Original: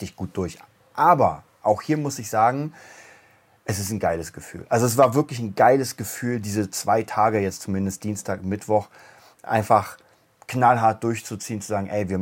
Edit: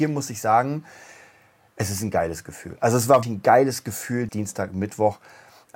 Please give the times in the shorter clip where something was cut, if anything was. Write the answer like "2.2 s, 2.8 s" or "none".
3.2 s, 4.3 s